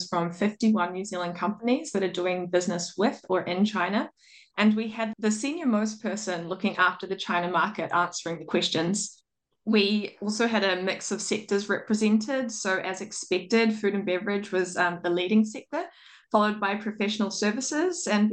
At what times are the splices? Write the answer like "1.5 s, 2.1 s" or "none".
none